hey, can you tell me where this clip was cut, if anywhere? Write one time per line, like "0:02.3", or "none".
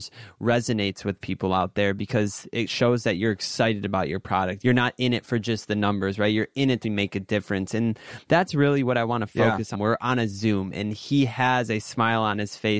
0:04.6
0:06.8
0:09.7